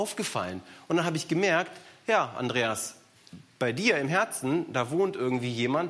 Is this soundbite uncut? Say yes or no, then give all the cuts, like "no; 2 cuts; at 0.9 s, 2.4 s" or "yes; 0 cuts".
yes; 0 cuts